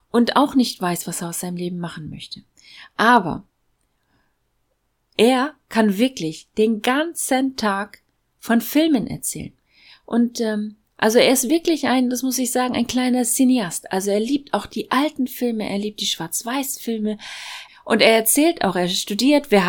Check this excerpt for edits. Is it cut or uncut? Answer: uncut